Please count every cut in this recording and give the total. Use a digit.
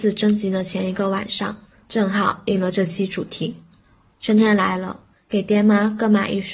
2